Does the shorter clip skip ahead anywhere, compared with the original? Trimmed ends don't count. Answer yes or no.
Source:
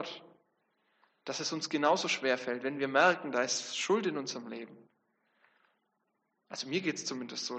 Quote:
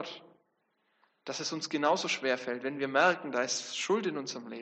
no